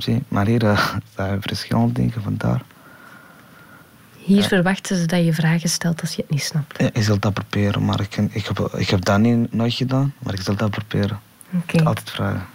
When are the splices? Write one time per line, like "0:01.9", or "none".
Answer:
none